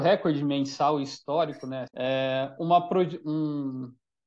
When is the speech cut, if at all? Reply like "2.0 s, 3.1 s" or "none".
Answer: 1.9 s